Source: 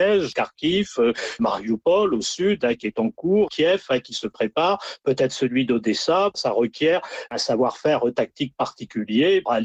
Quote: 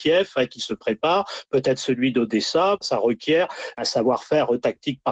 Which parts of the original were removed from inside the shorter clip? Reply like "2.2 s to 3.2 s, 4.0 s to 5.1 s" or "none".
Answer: none